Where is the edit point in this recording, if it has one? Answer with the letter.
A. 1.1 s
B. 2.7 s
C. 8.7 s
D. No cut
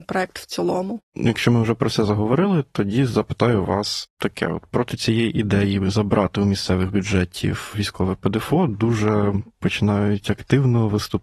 A